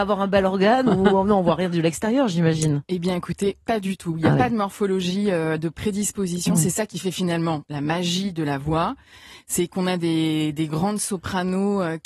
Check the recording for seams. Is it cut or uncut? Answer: uncut